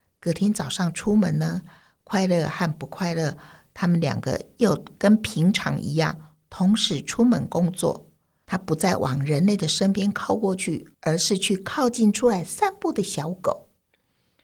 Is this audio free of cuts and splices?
no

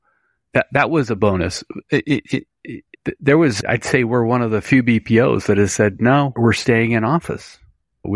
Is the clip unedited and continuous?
no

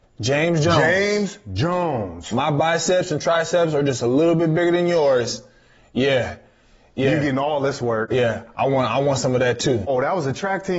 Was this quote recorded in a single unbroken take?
yes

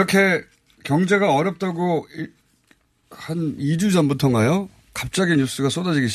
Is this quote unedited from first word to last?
yes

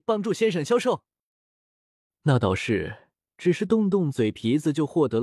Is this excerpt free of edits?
yes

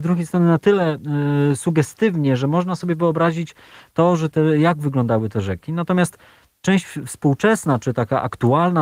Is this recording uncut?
yes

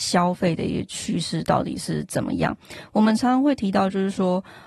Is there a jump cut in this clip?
no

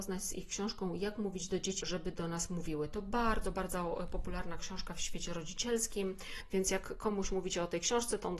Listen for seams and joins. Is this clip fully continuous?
no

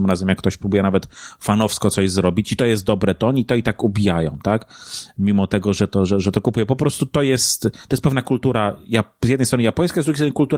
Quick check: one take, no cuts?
yes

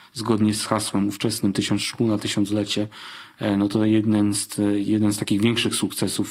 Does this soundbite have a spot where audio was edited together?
no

